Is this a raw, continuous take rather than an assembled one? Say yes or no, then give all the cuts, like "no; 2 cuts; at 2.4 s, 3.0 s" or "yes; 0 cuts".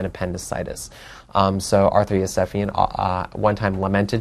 yes; 0 cuts